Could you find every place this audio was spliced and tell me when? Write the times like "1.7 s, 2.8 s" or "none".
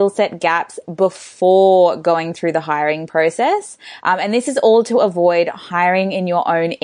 none